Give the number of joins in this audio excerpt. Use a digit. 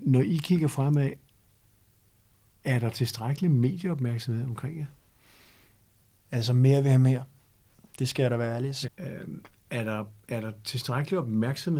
1